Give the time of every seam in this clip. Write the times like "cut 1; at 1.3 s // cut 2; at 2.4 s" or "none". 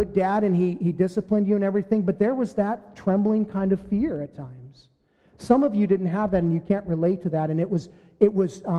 none